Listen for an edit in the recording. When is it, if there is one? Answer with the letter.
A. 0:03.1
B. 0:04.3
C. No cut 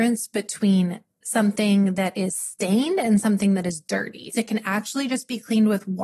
B